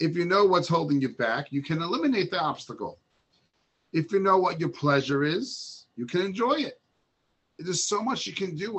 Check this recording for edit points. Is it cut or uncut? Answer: uncut